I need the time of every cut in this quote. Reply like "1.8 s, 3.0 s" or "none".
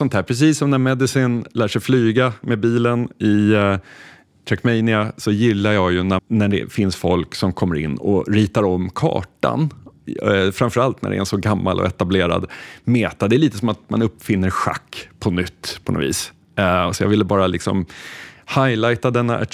6.2 s